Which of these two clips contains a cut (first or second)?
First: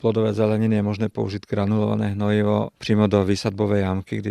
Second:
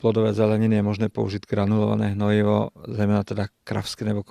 first